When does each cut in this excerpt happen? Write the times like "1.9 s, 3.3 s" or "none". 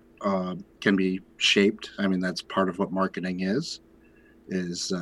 none